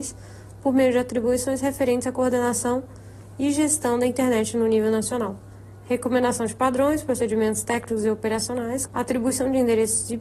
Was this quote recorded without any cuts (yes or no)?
no